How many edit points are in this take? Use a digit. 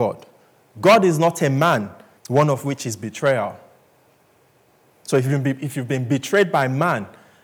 1